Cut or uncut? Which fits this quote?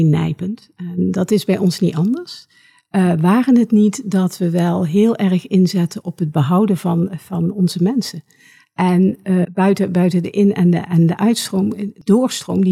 cut